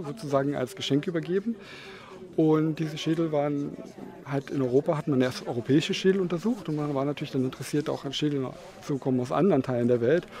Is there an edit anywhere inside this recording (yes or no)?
no